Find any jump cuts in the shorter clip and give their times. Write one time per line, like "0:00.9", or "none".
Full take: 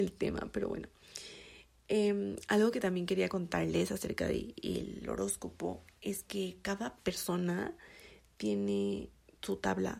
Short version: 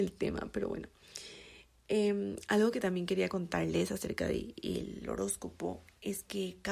none